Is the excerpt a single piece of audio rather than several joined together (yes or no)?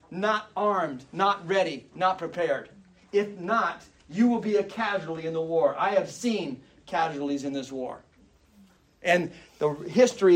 yes